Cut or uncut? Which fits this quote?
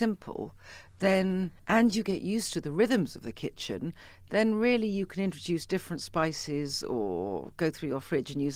cut